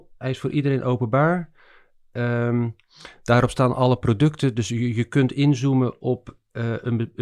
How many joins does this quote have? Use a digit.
0